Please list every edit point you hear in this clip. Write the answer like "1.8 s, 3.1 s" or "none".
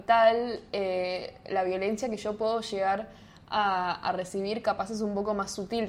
none